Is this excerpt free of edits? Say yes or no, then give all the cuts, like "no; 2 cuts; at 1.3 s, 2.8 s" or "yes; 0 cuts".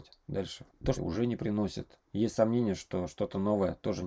no; 1 cut; at 1.0 s